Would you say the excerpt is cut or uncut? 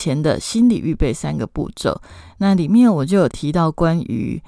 cut